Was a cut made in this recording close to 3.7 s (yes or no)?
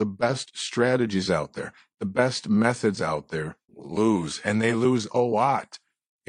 yes